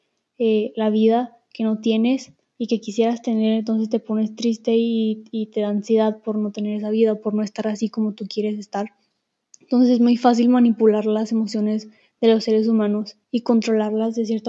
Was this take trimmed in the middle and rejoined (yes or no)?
yes